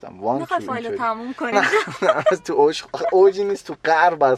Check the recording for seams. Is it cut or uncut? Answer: cut